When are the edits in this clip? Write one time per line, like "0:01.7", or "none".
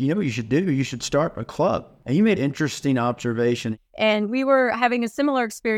0:02.4
0:03.8